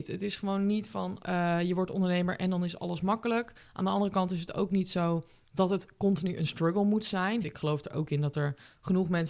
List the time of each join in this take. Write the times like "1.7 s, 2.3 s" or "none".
1.2 s, 7.4 s